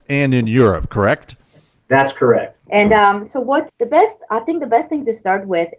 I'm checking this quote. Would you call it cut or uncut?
cut